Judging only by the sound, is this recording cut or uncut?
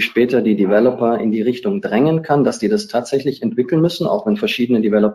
uncut